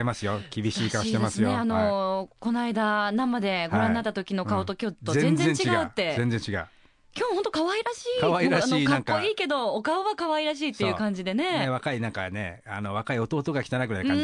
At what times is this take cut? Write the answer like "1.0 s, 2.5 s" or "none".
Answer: none